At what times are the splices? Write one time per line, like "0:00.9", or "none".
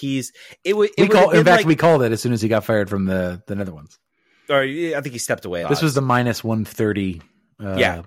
0:05.6